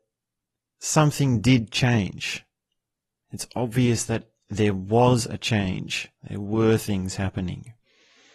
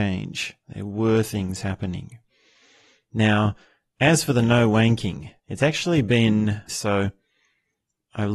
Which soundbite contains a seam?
second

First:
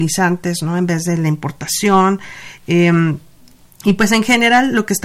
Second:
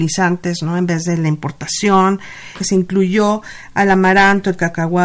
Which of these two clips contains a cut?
second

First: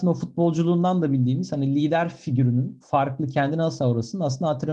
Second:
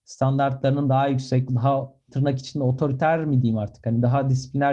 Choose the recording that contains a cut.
second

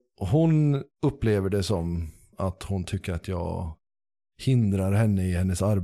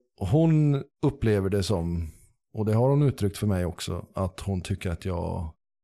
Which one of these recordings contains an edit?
first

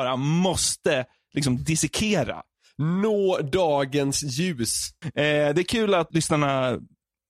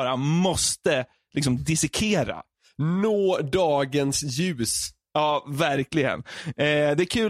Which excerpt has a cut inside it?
first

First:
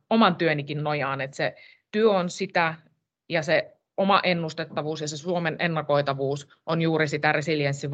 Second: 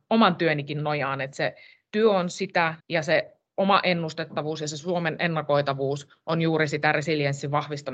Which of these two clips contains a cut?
second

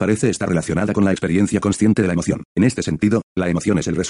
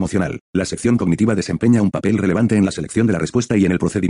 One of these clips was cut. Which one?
first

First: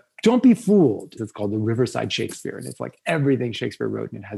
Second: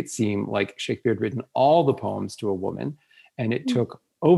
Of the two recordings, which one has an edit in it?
first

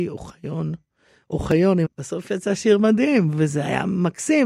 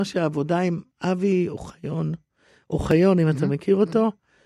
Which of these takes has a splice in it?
first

